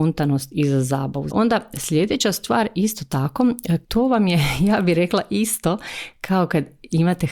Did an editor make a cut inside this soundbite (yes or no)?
yes